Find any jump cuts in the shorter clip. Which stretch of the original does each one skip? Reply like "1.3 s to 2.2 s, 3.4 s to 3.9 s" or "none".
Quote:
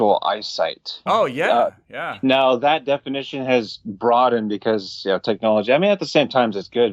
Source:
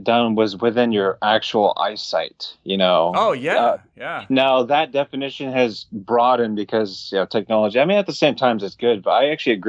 2.6 s to 3.1 s